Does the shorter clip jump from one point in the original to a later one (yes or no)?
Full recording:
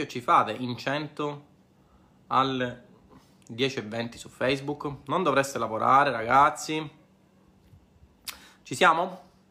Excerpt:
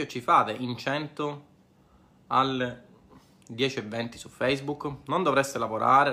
no